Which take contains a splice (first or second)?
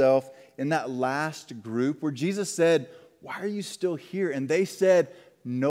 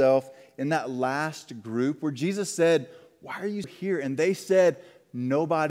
second